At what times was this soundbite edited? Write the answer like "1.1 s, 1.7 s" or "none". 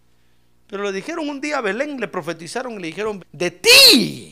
3.2 s